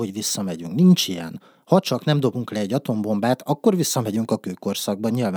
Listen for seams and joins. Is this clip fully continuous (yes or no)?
yes